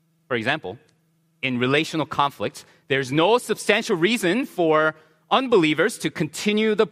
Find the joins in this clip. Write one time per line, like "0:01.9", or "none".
none